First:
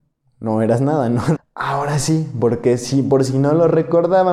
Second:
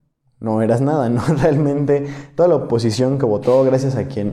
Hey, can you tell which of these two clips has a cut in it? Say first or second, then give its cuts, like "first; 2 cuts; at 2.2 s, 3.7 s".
first; 1 cut; at 1.4 s